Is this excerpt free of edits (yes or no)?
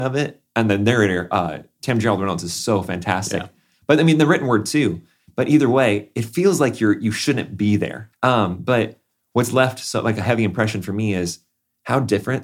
no